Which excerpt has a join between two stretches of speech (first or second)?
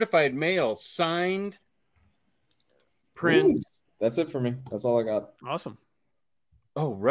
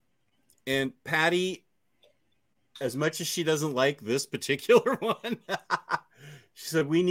first